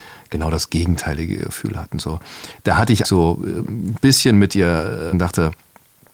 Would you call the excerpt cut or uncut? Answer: cut